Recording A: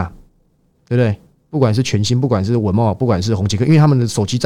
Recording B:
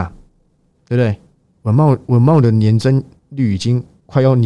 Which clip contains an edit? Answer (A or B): B